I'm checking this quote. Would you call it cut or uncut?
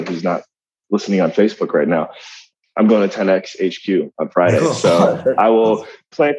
uncut